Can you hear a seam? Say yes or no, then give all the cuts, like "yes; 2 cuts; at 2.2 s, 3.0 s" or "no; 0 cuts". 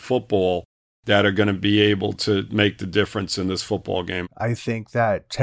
yes; 1 cut; at 4.2 s